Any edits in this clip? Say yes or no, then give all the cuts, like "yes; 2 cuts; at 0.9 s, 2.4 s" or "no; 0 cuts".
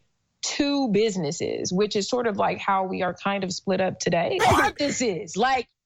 yes; 1 cut; at 4.4 s